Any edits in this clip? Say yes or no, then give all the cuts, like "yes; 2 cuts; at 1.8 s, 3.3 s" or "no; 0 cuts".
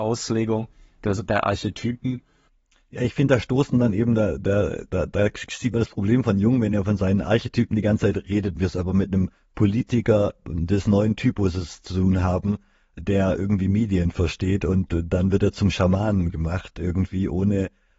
no; 0 cuts